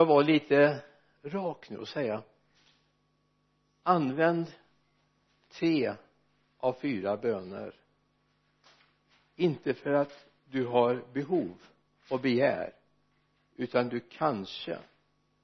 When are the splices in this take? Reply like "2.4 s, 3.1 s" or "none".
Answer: none